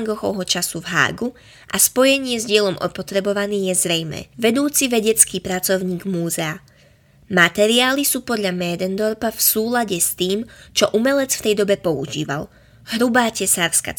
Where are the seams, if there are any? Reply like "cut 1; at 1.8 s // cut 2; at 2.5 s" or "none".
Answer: cut 1; at 4.3 s